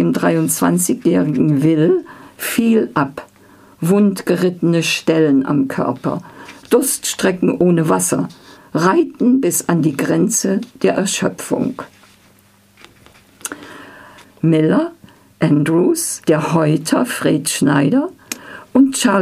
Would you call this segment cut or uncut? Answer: cut